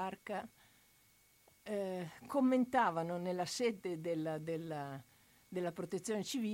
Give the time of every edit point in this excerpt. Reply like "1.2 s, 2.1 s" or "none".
none